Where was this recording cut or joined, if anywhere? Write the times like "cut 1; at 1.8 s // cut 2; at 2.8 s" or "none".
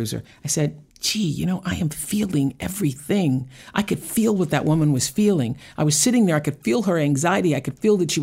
cut 1; at 0.9 s